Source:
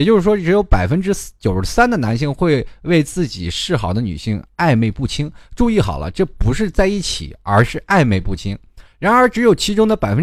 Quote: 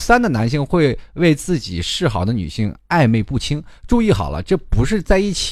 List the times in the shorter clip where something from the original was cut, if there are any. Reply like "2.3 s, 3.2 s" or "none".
none